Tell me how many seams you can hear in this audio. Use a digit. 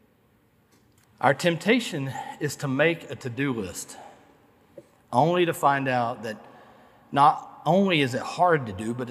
1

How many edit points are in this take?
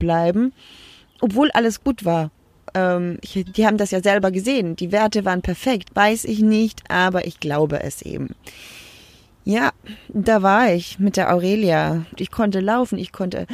2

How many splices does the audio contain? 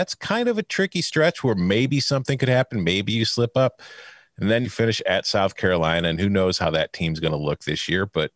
1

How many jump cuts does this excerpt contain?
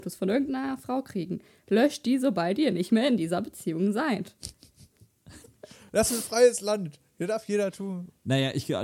1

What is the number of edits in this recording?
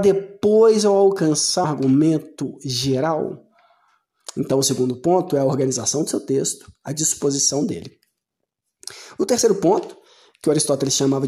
1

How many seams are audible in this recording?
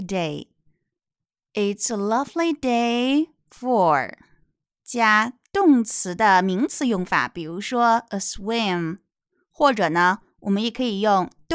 1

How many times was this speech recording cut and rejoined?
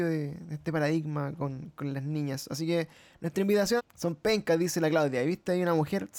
1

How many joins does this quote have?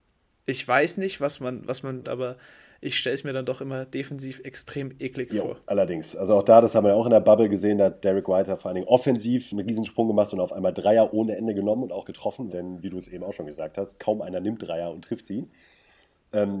2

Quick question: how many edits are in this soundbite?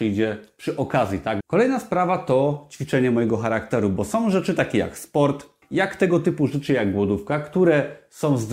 2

